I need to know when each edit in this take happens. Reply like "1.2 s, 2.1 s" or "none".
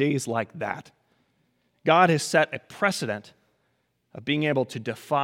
none